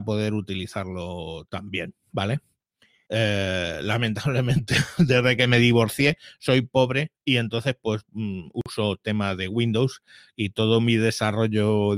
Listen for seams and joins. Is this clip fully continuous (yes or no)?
no